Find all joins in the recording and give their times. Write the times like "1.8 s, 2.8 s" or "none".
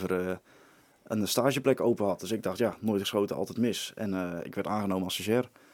none